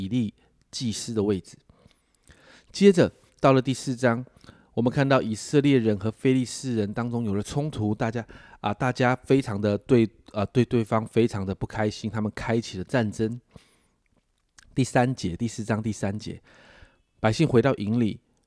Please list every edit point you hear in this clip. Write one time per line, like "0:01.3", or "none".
none